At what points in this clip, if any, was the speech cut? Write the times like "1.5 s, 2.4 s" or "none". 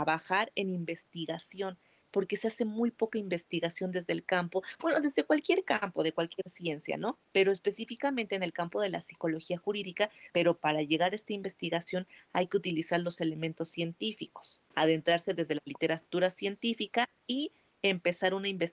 7.2 s, 10.3 s